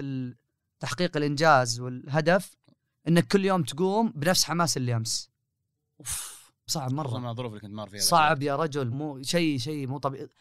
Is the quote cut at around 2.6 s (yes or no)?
no